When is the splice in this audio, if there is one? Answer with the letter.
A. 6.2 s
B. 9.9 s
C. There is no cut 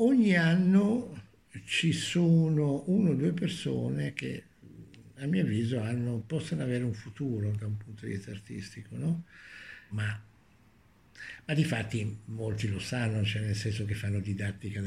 B